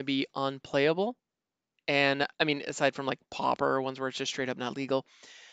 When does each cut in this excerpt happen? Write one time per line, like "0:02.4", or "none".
0:02.3